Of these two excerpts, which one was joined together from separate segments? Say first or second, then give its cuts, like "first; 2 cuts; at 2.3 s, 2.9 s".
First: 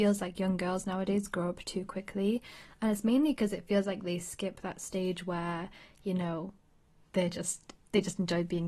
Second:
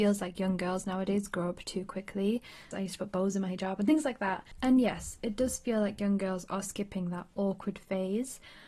second; 1 cut; at 2.7 s